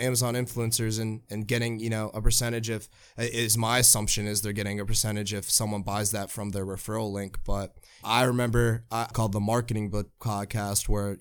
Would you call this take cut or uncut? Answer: cut